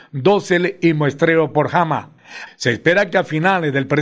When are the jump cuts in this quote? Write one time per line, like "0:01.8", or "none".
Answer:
0:02.5